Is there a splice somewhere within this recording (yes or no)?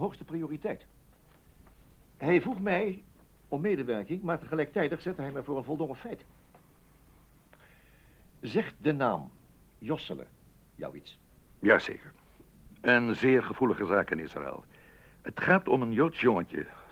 no